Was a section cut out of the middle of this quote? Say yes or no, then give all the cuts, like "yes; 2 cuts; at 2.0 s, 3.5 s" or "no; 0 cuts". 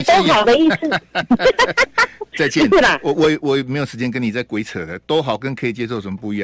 no; 0 cuts